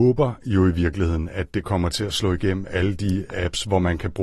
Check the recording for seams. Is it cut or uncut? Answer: uncut